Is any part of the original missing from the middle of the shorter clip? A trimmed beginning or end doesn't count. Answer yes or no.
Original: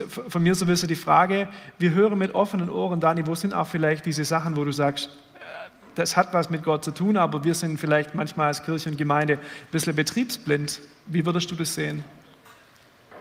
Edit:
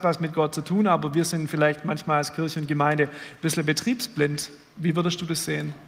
no